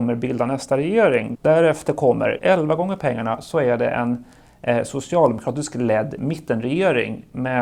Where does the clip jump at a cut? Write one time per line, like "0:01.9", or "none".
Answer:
0:01.3
0:02.4